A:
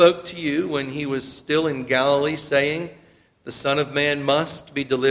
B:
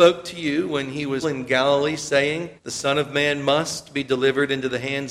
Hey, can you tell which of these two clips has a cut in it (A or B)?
B